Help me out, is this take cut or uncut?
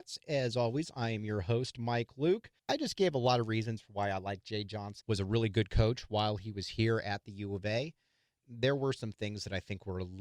cut